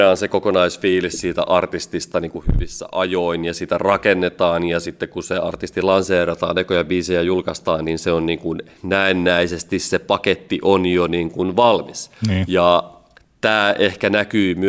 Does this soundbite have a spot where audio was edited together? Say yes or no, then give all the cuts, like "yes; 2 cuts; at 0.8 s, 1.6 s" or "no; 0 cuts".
no; 0 cuts